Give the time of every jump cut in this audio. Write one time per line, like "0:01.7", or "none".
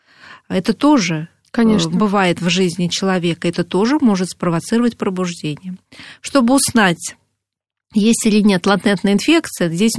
none